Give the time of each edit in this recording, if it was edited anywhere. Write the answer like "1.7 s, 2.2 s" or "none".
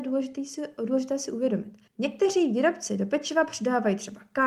1.9 s